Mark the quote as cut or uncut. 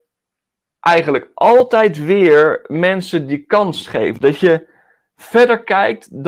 uncut